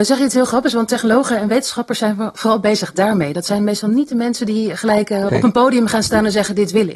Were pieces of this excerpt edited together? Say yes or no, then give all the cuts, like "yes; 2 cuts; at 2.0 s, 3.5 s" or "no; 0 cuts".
yes; 1 cut; at 5.3 s